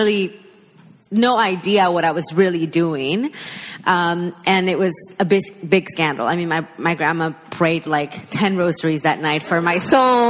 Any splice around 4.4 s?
no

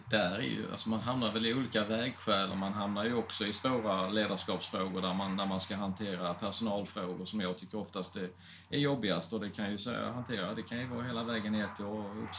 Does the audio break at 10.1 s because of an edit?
no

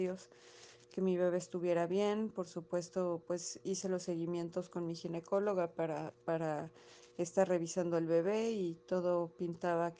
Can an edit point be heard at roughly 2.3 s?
no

